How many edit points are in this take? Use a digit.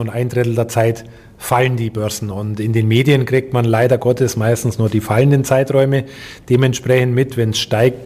0